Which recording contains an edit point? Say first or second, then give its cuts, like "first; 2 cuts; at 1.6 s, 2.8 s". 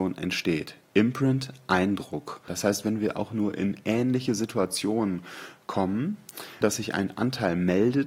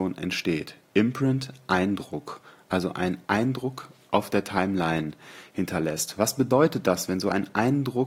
first; 2 cuts; at 2.5 s, 6.6 s